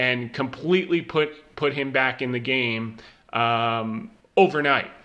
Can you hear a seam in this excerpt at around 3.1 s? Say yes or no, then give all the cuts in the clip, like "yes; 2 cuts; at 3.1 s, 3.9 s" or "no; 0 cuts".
no; 0 cuts